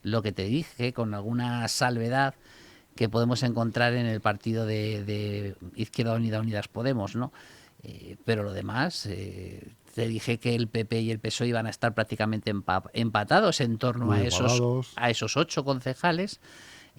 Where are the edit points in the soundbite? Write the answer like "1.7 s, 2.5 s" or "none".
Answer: none